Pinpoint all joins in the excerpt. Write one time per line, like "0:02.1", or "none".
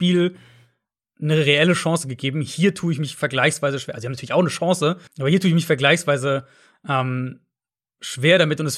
0:05.1